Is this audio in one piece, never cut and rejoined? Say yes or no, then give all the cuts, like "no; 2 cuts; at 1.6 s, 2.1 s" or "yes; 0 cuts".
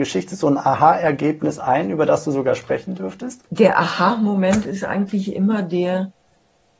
no; 1 cut; at 3.5 s